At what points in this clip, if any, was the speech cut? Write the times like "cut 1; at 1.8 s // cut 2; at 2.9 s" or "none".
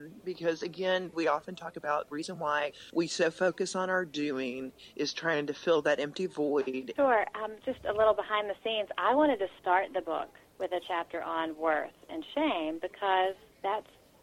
cut 1; at 1.1 s // cut 2; at 7.0 s